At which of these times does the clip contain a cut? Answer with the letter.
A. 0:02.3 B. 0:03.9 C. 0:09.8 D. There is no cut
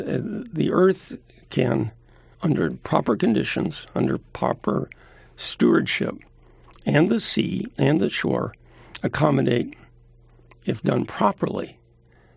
A